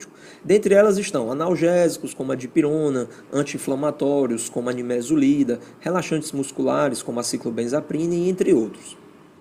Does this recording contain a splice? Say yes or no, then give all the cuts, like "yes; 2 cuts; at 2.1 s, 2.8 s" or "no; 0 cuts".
no; 0 cuts